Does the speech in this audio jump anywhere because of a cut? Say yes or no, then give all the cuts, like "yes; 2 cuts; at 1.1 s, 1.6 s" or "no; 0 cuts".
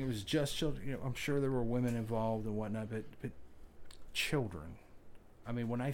no; 0 cuts